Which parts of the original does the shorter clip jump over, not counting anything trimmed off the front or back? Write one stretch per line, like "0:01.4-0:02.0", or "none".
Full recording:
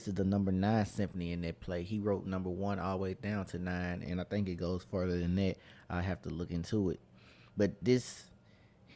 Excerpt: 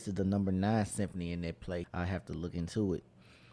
0:01.8-0:05.8